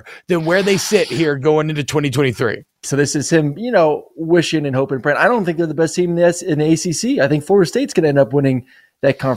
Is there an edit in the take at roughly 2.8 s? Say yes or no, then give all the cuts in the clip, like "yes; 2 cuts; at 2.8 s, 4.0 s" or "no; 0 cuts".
yes; 1 cut; at 2.8 s